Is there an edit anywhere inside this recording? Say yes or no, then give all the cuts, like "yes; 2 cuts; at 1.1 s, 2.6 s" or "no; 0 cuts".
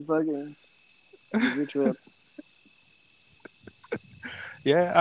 no; 0 cuts